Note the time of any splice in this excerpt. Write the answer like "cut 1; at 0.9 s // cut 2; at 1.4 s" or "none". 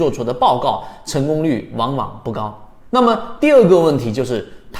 cut 1; at 2.8 s